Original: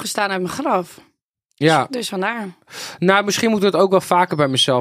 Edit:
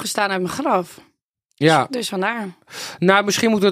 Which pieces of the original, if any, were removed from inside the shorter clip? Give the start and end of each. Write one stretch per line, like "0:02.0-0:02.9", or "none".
none